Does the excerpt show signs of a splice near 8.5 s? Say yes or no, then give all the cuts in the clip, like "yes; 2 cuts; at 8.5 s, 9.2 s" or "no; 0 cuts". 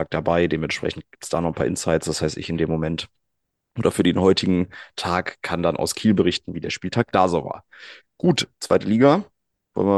yes; 1 cut; at 8.5 s